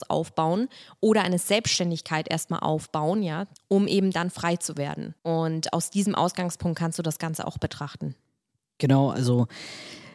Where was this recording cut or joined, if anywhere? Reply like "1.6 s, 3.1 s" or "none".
3.5 s, 5.2 s